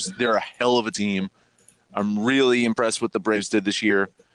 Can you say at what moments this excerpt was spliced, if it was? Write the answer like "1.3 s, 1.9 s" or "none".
none